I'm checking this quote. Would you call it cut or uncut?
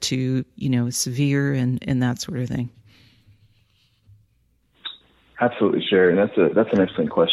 uncut